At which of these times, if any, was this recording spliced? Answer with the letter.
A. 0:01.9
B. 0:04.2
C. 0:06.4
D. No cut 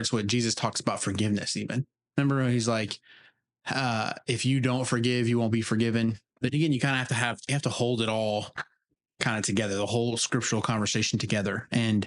C